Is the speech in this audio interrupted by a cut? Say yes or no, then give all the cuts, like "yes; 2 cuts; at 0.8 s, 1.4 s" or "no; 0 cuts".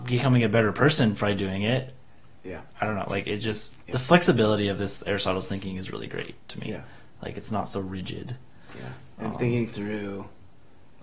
no; 0 cuts